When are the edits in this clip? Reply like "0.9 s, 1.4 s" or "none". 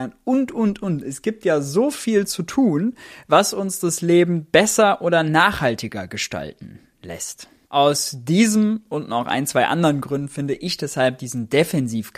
none

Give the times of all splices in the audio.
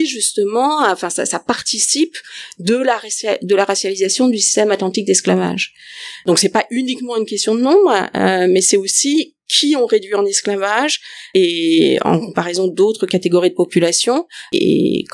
none

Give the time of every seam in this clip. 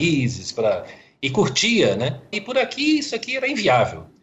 2.3 s

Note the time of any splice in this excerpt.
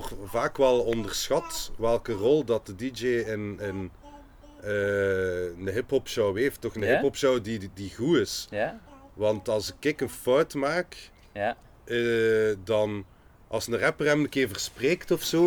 none

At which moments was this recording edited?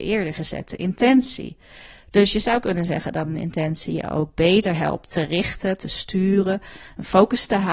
none

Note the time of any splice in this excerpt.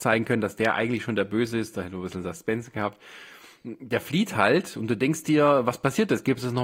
none

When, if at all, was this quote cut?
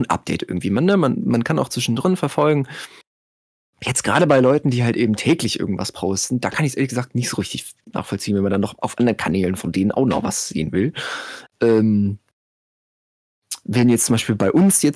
none

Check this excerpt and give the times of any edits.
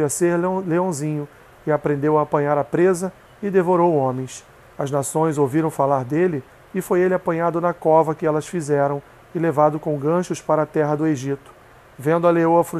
none

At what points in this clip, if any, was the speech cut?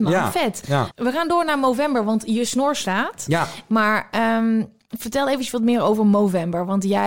3.7 s

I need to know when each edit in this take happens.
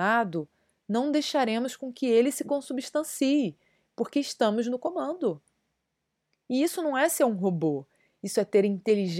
none

